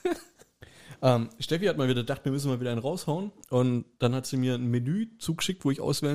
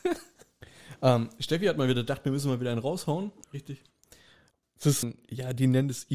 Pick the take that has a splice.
second; 2 cuts; at 3.4 s, 5.0 s

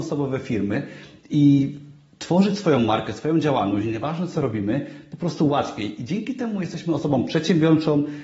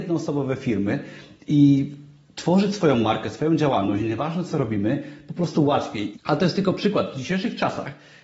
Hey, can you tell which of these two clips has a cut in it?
second; 1 cut; at 6.1 s

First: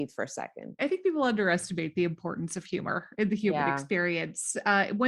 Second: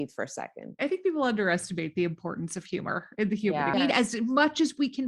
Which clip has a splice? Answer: second; 1 cut; at 3.7 s

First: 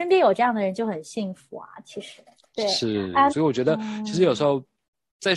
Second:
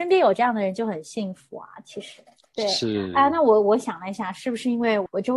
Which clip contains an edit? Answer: first; 1 cut; at 3.3 s

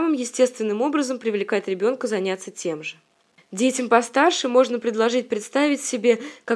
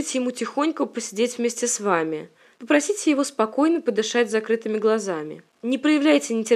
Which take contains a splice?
second; 1 cut; at 2.5 s

